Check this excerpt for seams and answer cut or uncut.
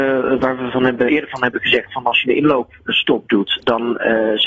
cut